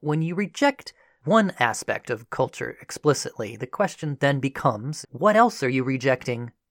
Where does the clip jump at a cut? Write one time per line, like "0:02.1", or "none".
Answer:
0:05.0